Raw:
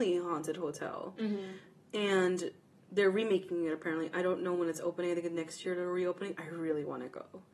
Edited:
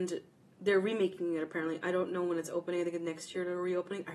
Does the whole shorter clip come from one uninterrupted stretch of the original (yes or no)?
yes